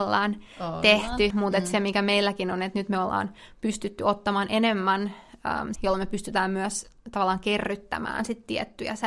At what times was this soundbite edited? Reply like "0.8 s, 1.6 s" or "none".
1.3 s, 5.7 s